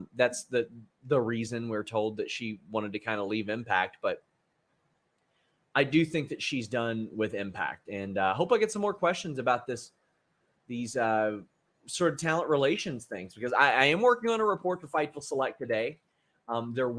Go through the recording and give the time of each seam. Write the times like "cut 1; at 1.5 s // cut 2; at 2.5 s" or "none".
none